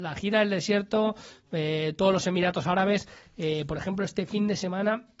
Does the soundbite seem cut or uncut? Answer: uncut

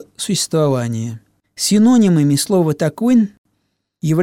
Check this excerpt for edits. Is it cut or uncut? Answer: cut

